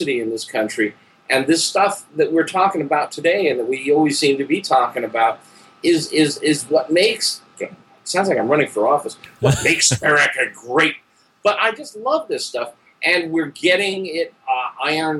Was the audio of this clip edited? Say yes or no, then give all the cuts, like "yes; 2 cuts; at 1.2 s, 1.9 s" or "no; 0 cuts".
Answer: no; 0 cuts